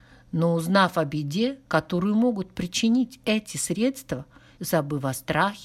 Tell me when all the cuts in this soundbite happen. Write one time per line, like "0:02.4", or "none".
0:04.6